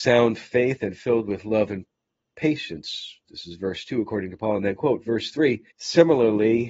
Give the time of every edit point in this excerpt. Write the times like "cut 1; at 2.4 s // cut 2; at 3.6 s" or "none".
cut 1; at 5.7 s